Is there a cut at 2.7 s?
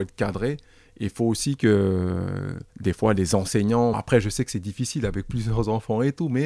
yes; 2 cuts; at 2.7 s, 3.9 s

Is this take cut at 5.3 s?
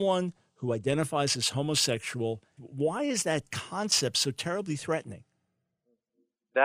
no; 1 cut; at 2.6 s

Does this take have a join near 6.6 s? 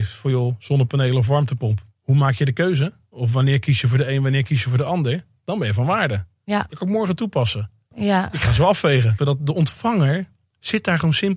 no; 2 cuts; at 7.9 s, 9.2 s

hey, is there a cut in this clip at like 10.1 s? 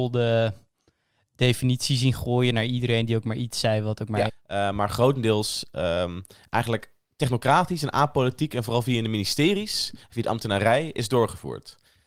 no; 1 cut; at 4.3 s

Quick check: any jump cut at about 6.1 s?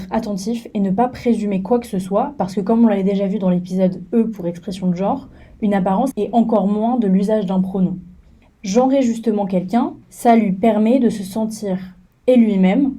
yes; 3 cuts; at 6.1 s, 8.5 s, 10.0 s

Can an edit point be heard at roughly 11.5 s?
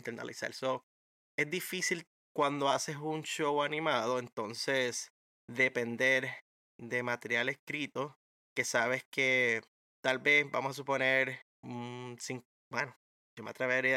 yes; 1 cut; at 11.5 s

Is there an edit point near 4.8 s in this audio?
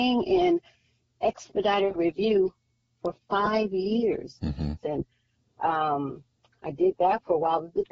yes; 1 cut; at 4.8 s

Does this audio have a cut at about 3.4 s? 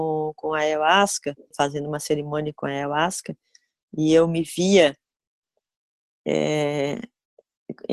no; 1 cut; at 1.5 s

